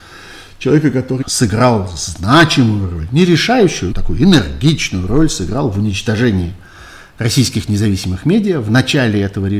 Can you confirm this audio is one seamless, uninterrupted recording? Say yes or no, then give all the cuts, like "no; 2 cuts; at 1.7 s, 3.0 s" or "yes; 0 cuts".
no; 2 cuts; at 1.2 s, 3.9 s